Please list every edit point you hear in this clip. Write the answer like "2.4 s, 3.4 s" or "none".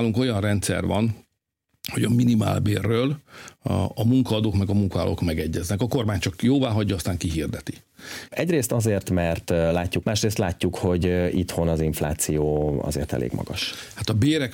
8.3 s, 10.0 s

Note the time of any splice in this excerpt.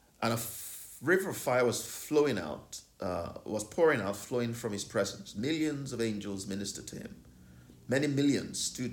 none

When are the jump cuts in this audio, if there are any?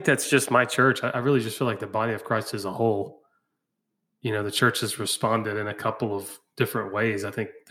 none

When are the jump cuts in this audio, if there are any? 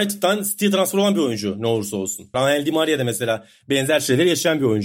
2.3 s

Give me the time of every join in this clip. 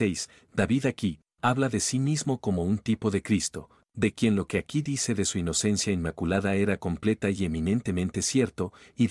1.3 s

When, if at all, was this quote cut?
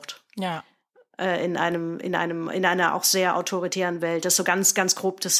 none

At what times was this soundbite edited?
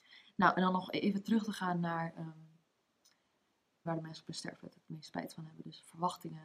3.9 s

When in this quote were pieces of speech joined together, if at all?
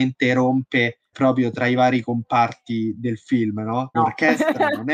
1.1 s, 3.9 s

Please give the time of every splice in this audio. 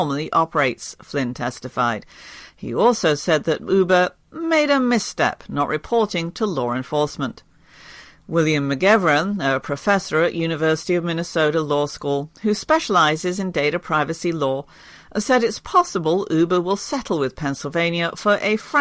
none

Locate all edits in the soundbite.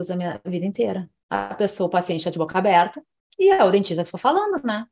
none

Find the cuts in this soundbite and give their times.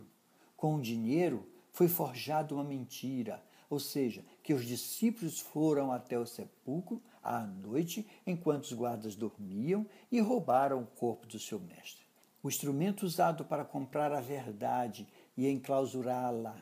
12.3 s

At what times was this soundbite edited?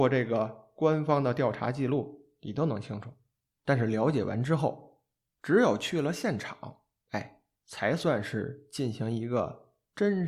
none

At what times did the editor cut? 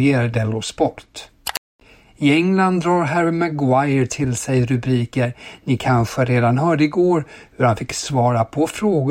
none

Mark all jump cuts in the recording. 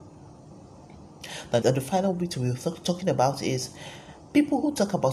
1.6 s

